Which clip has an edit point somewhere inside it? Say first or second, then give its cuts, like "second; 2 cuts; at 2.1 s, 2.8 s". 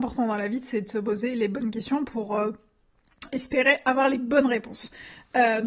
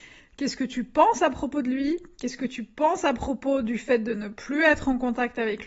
first; 1 cut; at 3.3 s